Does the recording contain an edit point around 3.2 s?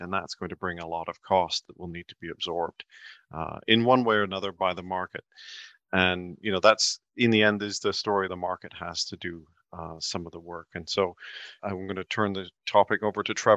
no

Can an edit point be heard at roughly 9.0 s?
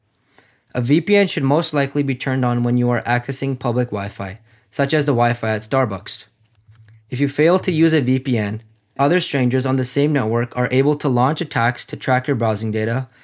yes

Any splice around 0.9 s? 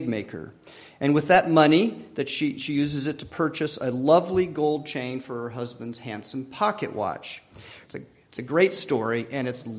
no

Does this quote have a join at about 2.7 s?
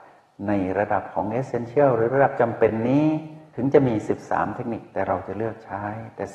no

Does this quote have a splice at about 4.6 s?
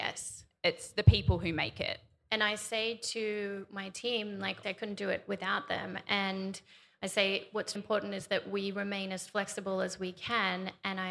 yes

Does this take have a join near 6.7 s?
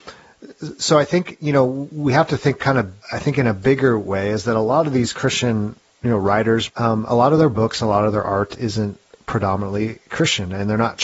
yes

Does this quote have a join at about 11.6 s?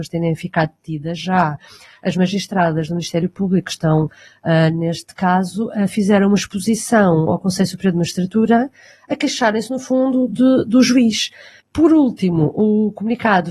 yes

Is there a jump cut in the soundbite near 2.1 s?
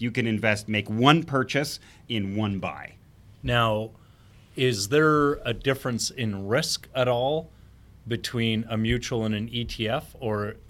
yes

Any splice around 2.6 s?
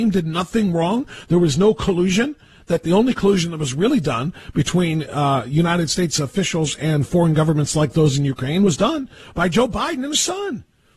no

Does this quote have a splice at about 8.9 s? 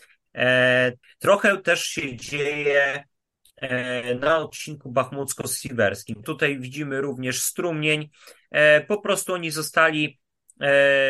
no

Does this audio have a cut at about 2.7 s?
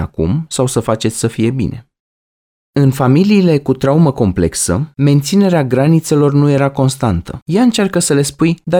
no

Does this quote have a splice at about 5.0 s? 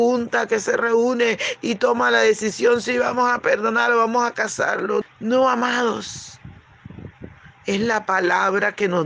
yes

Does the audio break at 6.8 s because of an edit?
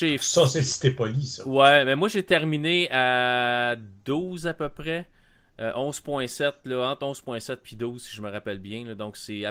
no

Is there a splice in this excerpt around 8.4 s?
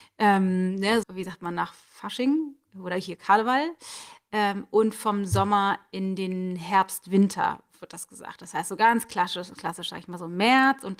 no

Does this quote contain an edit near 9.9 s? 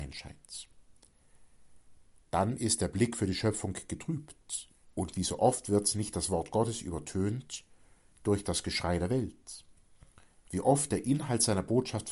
no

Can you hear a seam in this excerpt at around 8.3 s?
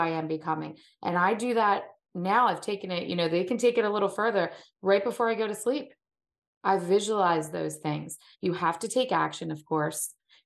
yes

